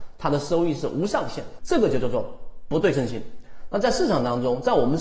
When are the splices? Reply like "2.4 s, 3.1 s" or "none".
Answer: 1.6 s

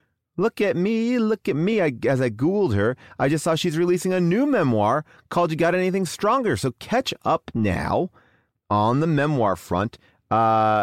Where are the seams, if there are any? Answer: none

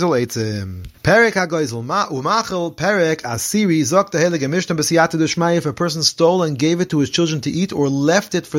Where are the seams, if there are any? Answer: 1.0 s

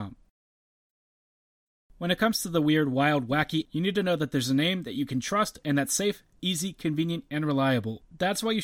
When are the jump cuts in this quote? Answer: 3.6 s

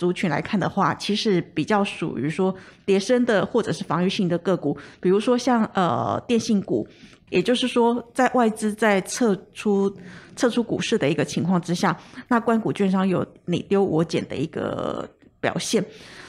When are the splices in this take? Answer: 7.3 s

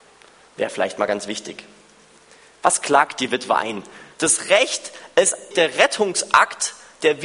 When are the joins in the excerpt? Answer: 4.1 s, 5.5 s

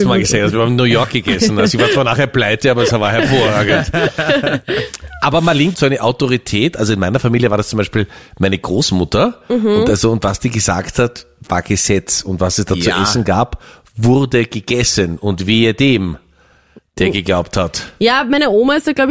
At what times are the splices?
5.7 s

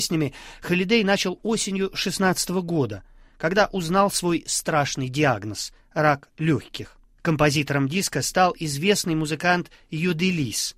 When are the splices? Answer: 7.1 s

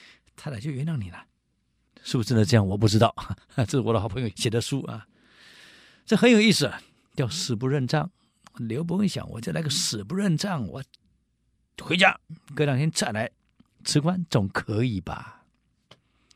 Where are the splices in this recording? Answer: none

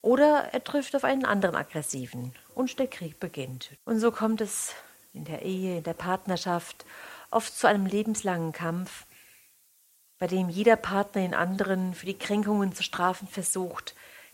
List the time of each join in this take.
3.8 s

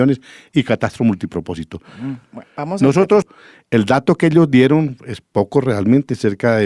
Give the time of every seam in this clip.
3.2 s

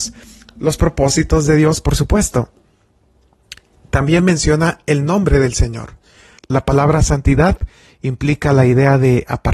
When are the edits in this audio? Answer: 6.4 s

